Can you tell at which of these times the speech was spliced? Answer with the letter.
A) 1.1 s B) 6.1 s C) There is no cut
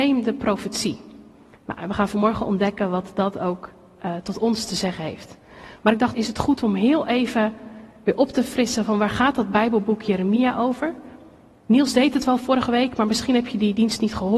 B